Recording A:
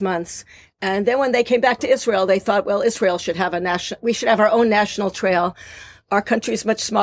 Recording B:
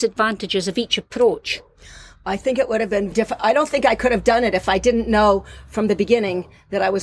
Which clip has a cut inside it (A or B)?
B